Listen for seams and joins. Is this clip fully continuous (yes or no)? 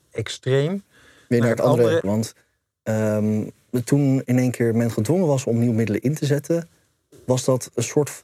no